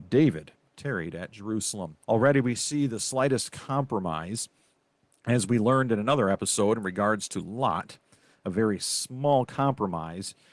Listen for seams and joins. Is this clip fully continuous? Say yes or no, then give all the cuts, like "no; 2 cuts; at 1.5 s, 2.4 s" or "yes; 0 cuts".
no; 1 cut; at 2.0 s